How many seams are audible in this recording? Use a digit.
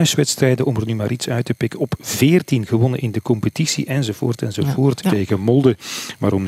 1